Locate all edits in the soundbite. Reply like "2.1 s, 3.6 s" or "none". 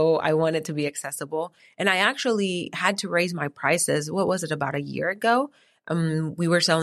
none